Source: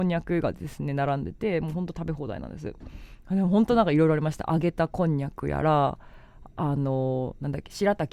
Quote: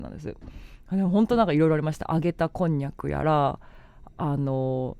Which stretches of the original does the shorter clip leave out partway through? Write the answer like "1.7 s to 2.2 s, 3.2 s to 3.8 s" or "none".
none